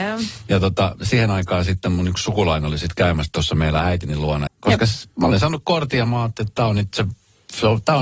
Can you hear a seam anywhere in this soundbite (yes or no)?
yes